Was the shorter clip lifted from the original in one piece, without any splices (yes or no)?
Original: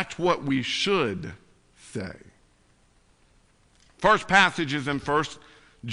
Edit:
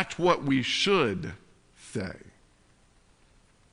yes